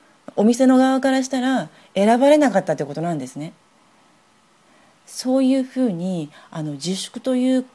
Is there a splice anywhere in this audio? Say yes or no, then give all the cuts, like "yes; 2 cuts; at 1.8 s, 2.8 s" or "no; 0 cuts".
no; 0 cuts